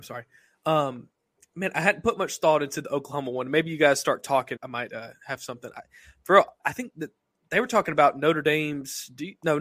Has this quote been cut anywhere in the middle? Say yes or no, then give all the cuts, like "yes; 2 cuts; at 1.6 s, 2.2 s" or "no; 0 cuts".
yes; 2 cuts; at 4.6 s, 6.6 s